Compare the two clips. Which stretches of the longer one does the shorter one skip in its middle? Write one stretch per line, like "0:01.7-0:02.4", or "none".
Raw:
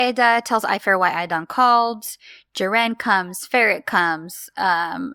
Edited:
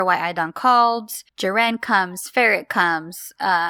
0:02.2-0:02.5